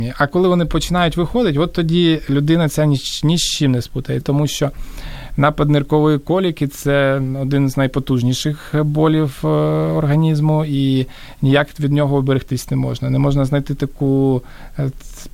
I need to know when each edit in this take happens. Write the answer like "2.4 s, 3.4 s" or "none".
4.2 s